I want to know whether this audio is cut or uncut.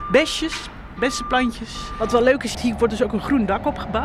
cut